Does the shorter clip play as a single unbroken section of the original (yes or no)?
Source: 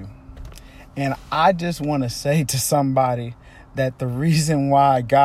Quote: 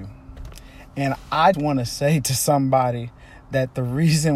no